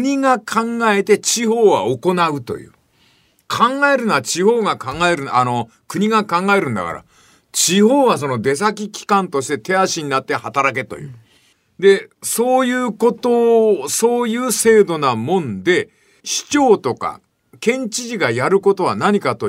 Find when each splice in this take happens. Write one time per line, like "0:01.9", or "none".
none